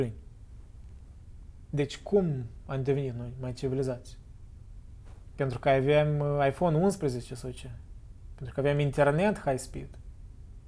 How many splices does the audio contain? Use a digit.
1